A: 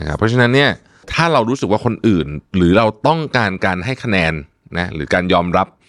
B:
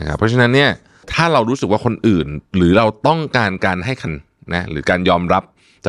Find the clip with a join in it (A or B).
B